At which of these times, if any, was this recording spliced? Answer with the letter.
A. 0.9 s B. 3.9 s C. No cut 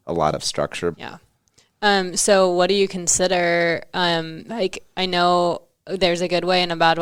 A